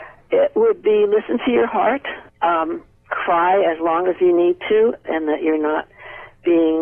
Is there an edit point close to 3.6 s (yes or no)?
no